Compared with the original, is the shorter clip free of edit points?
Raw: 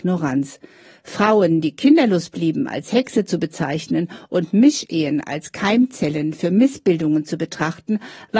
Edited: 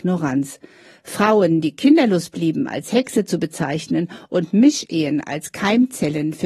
yes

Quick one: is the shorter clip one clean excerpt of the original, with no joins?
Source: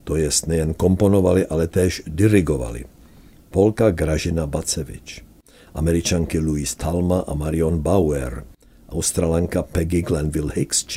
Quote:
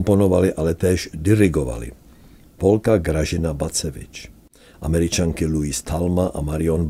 yes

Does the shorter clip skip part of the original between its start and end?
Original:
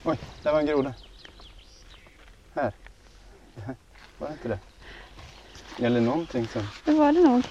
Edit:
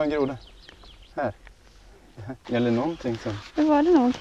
yes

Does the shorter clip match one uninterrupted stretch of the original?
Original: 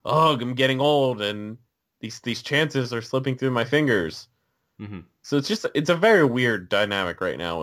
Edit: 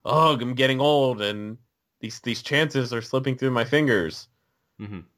yes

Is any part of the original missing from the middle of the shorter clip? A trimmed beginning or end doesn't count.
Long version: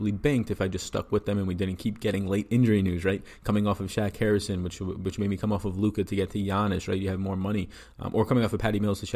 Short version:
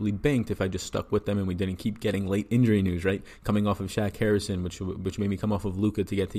no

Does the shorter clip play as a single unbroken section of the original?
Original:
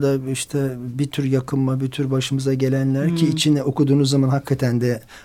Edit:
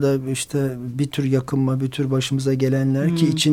yes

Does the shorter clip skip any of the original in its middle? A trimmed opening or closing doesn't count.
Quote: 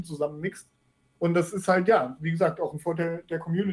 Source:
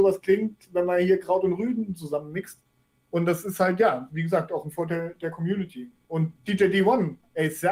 no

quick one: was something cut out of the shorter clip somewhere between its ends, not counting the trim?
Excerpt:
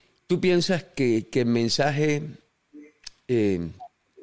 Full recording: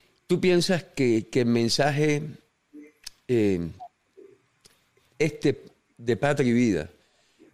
no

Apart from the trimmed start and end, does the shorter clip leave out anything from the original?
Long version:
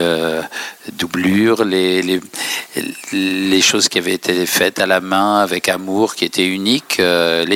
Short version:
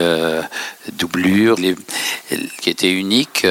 yes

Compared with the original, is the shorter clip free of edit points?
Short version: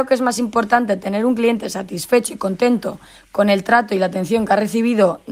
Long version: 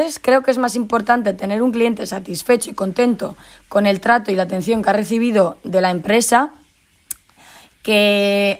yes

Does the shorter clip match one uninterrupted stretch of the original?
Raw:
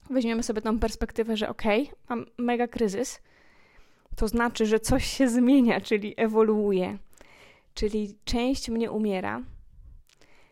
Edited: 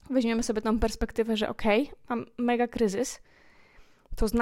yes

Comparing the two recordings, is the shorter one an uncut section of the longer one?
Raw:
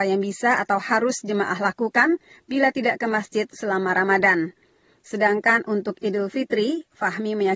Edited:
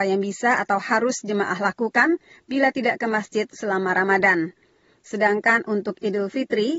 yes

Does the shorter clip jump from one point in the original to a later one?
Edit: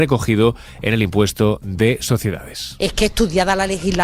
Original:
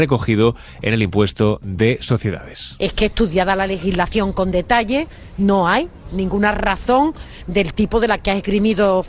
no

